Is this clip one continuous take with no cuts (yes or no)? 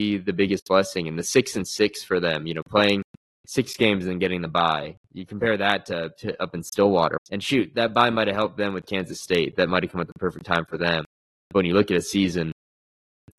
no